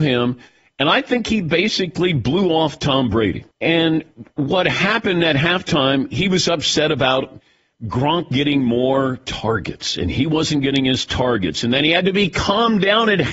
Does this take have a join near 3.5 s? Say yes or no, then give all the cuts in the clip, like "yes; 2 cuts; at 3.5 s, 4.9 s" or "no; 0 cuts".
yes; 1 cut; at 3.5 s